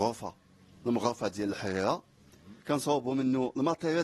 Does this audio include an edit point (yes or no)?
yes